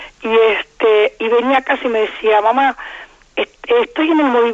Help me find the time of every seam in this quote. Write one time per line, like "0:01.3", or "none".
none